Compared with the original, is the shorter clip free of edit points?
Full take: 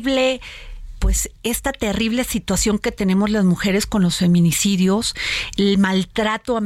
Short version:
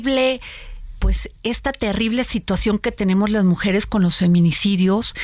yes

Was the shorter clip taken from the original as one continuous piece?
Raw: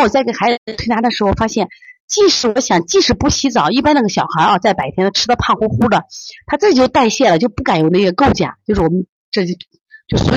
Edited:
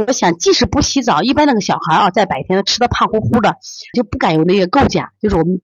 no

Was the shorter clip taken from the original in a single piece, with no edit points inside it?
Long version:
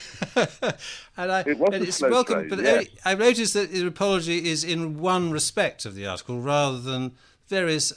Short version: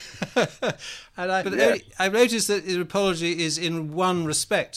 no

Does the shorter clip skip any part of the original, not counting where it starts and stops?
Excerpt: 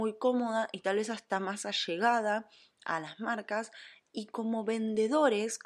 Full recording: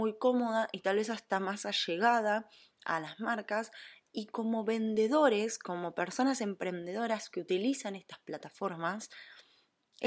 no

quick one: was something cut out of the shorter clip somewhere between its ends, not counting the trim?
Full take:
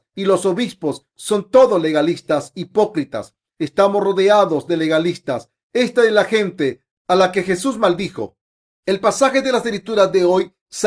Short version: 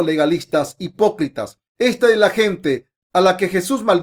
yes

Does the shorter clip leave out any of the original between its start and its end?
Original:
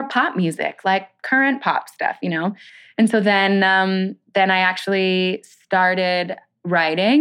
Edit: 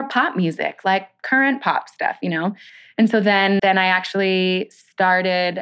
yes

